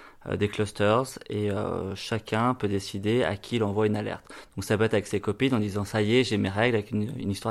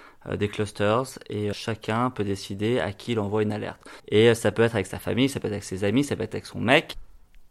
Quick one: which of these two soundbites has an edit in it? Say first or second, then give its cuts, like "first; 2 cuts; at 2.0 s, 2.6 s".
second; 2 cuts; at 1.5 s, 4.0 s